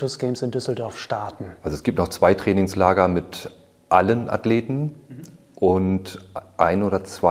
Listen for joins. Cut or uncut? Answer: uncut